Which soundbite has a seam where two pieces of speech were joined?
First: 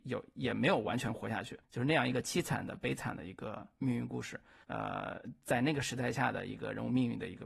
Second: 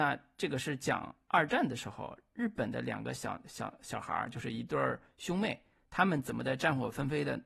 first; 2 cuts; at 1.6 s, 4.6 s

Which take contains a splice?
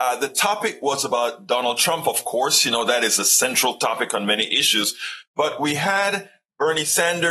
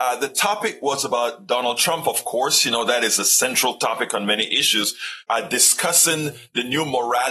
second; 1 cut; at 5.2 s

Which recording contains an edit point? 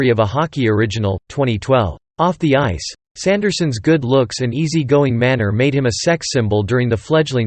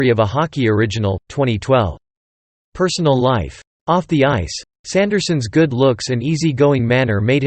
first; 1 cut; at 2.1 s

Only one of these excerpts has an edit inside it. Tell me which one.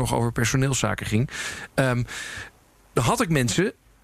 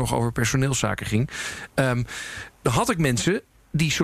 second; 1 cut; at 2.5 s

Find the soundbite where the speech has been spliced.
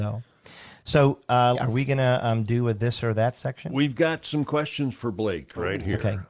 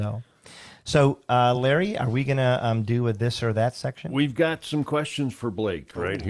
first; 1 cut; at 1.6 s

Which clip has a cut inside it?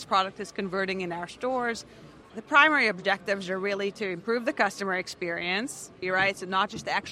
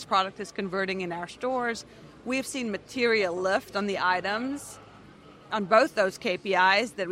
first; 2 cuts; at 2.2 s, 6.0 s

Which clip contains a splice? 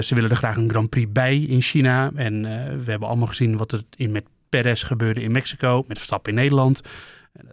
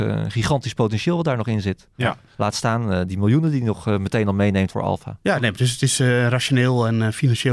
second; 1 cut; at 4.7 s

